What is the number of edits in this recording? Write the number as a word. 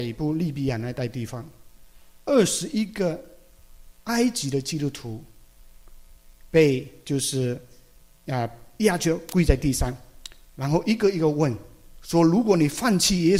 zero